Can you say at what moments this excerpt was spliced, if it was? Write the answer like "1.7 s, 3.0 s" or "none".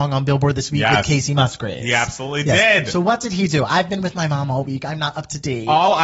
none